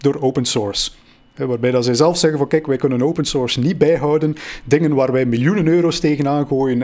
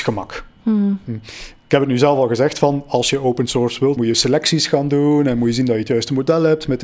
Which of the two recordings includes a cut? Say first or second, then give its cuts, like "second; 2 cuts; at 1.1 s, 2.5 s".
second; 1 cut; at 4.0 s